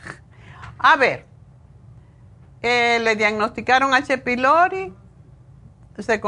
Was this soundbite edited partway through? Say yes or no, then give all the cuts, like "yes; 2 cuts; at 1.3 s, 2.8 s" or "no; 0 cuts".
no; 0 cuts